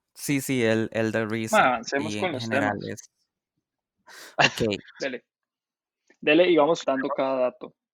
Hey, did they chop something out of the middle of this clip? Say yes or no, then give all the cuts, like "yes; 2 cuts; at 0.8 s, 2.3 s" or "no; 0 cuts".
yes; 2 cuts; at 5.0 s, 6.8 s